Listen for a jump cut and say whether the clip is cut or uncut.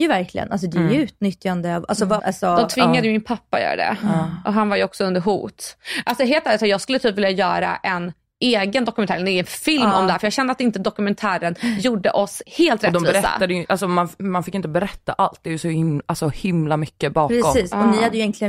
cut